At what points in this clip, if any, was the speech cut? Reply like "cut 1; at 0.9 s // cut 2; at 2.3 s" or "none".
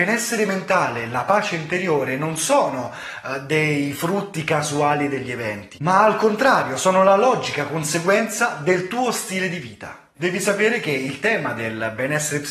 cut 1; at 10.2 s